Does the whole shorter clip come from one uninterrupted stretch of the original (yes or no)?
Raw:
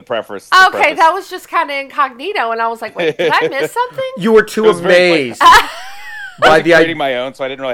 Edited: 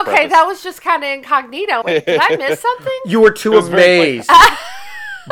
no